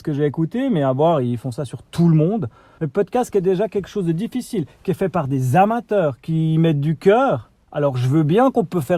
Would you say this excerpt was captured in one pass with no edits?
no; 2 cuts; at 2.8 s, 7.6 s

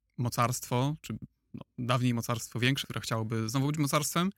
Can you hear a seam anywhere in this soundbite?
yes; 1 cut; at 2.8 s

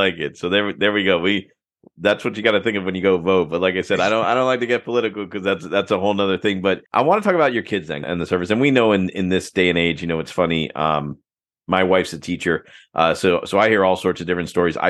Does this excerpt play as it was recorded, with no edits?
no; 2 cuts; at 6.9 s, 8.0 s

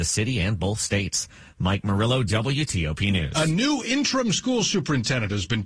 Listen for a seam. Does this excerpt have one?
no; 0 cuts

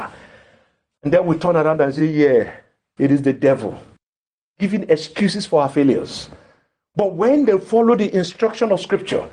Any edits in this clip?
no; 0 cuts

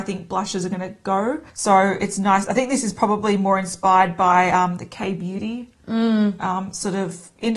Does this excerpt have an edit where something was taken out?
yes; 1 cut; at 1.5 s

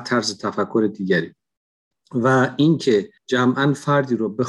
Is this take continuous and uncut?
no; 1 cut; at 3.2 s

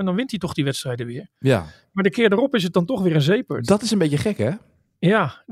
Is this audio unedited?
yes; 0 cuts

